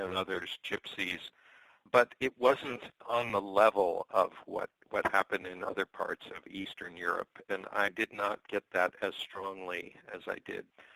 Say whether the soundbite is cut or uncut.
cut